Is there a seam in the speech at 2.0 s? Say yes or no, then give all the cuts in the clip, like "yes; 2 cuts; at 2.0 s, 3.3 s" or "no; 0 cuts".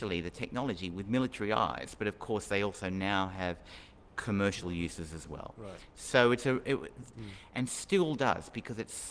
no; 1 cut; at 7.1 s